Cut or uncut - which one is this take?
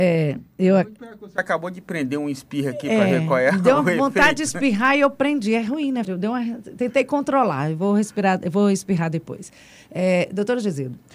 cut